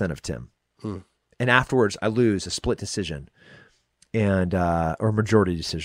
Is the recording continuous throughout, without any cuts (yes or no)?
yes